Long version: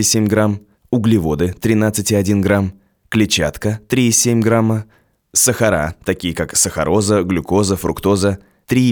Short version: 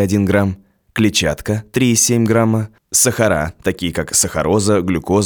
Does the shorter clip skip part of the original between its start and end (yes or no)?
yes